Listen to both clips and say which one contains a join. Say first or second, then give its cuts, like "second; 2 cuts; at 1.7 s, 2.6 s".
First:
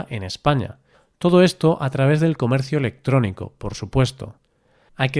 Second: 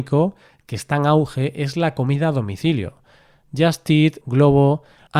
second; 1 cut; at 4.2 s